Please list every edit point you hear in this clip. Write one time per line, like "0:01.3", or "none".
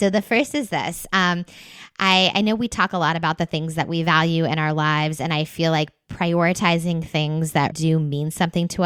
0:07.7